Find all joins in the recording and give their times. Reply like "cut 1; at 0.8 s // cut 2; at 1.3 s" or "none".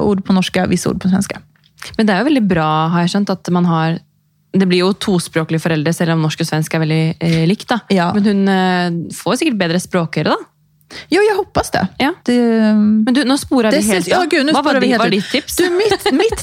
cut 1; at 12.2 s